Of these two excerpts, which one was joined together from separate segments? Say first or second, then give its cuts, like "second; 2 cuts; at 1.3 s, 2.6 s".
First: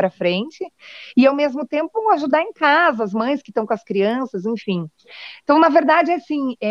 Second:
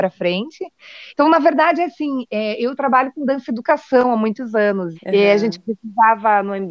second; 2 cuts; at 1.1 s, 4.9 s